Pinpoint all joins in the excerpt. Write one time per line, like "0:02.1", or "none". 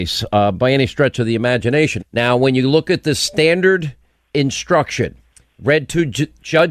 0:02.0